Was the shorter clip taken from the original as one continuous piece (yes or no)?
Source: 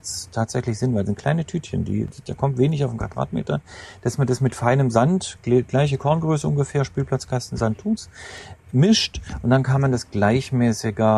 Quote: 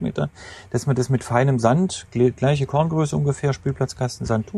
yes